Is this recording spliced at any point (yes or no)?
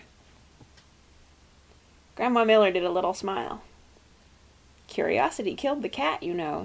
no